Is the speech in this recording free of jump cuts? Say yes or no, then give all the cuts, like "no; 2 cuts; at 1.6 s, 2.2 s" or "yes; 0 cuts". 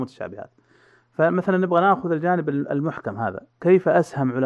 yes; 0 cuts